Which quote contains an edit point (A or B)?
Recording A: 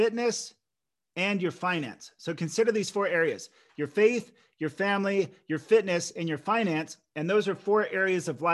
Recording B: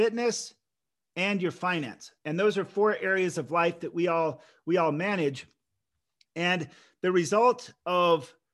B